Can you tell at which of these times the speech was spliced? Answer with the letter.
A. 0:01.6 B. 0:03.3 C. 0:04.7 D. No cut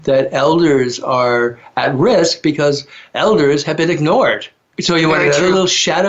C